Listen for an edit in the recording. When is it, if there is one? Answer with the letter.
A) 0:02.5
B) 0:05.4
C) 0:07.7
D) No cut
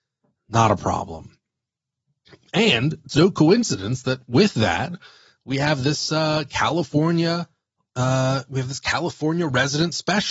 D